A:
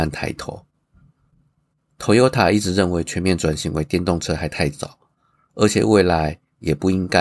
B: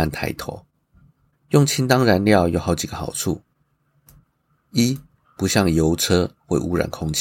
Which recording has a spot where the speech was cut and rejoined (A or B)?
B